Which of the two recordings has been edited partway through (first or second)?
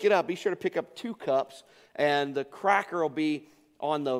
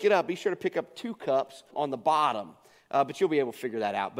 second